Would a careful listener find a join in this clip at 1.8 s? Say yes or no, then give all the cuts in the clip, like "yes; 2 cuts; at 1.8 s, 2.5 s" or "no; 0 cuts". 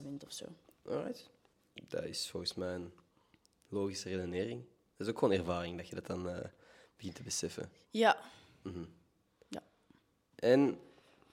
no; 0 cuts